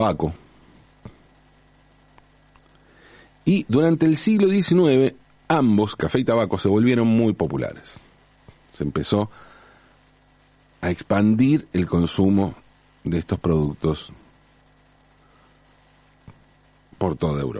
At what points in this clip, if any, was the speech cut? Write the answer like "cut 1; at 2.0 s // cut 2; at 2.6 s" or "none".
none